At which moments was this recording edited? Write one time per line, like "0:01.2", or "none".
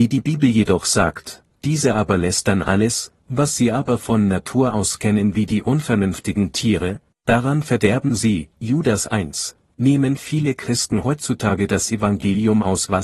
0:03.2
0:09.7

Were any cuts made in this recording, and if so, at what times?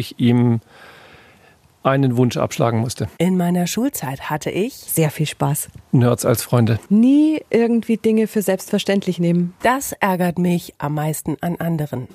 0:06.9
0:09.6

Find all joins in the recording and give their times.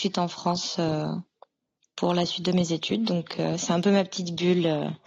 none

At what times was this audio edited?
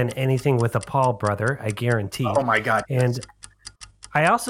none

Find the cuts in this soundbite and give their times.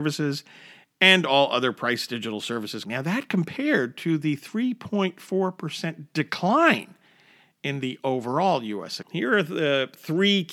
0:02.8
0:09.0

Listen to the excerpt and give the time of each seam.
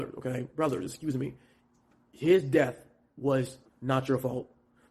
0:03.7

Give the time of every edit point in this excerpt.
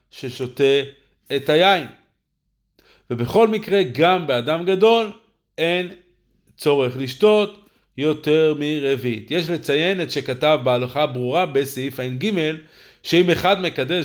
none

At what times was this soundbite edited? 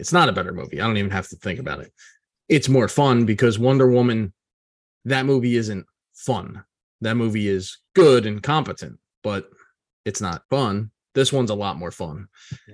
0:07.9
0:10.4

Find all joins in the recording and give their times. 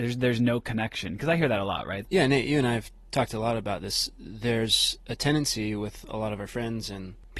0:02.1

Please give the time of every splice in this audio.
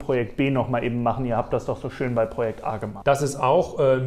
0:03.0

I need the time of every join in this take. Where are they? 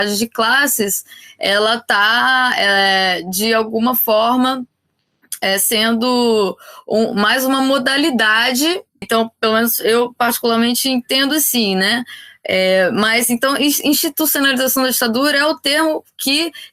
0:09.0

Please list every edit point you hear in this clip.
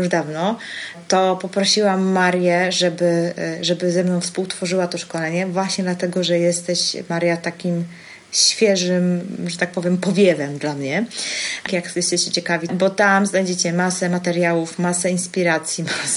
0:11.7
0:12.7

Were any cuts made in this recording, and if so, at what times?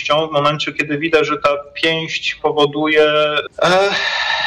0:03.5

